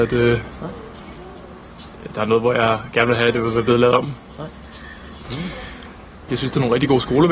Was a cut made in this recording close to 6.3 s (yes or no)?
yes